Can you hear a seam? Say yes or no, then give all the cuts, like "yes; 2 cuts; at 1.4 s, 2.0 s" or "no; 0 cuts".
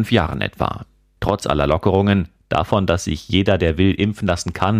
no; 0 cuts